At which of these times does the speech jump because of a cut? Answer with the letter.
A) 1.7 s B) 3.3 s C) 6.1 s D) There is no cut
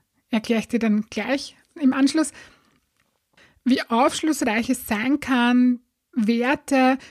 C